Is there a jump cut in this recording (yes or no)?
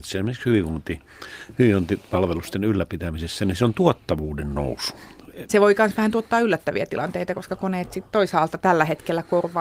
yes